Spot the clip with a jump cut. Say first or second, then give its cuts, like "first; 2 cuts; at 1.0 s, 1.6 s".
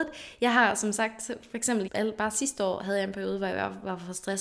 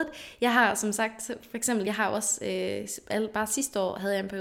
first; 1 cut; at 1.9 s